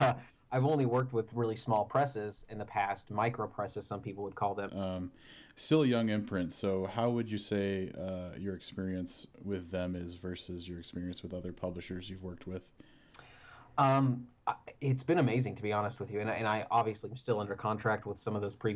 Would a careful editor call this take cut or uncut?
cut